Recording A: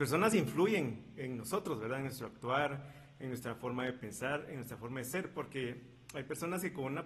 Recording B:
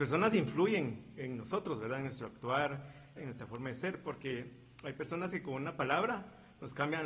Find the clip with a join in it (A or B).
B